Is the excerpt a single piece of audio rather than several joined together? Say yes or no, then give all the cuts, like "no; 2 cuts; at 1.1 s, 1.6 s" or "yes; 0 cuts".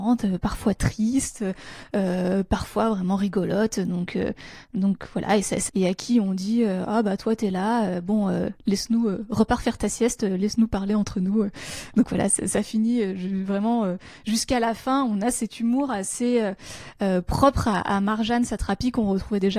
no; 1 cut; at 5.7 s